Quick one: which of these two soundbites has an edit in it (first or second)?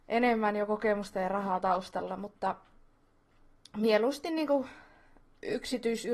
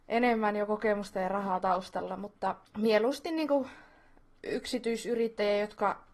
second